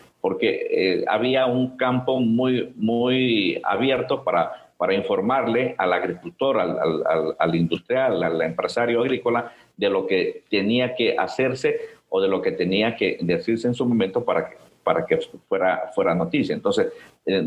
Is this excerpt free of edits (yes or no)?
yes